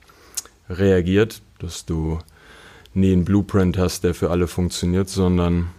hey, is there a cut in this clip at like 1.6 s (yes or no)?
yes